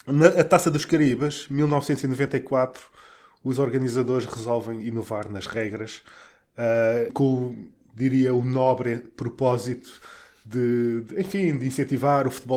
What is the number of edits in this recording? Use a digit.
1